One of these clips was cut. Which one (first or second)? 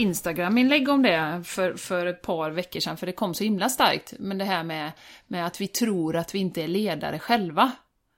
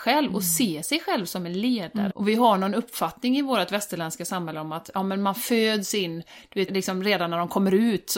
second